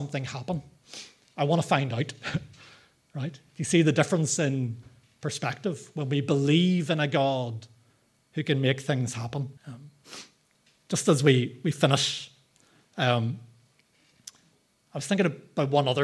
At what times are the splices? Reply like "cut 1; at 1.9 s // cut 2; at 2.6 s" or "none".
cut 1; at 9.6 s